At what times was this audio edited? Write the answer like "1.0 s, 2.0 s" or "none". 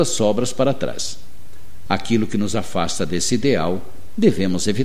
1.9 s